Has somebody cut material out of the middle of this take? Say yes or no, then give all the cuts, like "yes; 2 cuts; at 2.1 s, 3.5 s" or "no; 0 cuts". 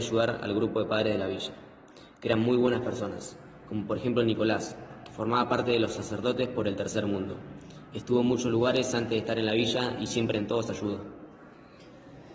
no; 0 cuts